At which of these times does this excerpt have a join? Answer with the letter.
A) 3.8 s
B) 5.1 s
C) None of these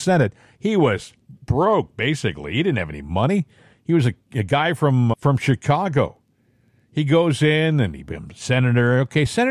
B